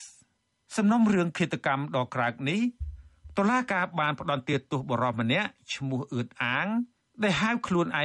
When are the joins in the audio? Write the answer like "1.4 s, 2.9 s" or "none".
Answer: 2.1 s